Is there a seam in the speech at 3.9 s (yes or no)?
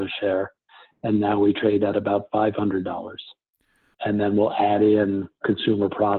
yes